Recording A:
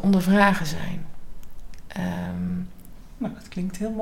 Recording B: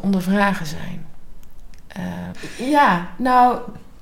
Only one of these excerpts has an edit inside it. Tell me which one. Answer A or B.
B